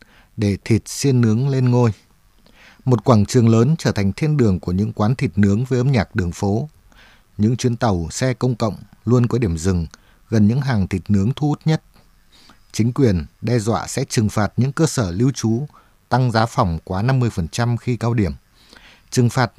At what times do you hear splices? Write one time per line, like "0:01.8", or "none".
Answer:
none